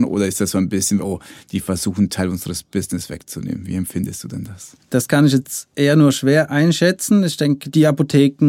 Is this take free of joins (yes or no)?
no